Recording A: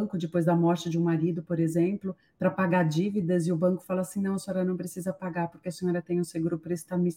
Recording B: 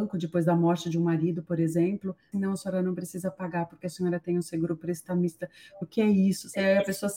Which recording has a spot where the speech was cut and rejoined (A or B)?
B